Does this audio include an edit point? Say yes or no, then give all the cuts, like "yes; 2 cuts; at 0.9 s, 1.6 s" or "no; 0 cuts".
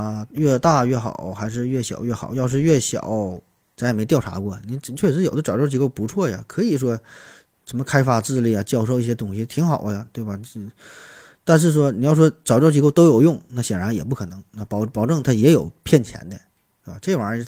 yes; 1 cut; at 3.8 s